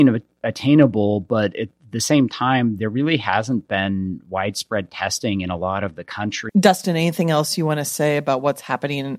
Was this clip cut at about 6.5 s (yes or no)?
yes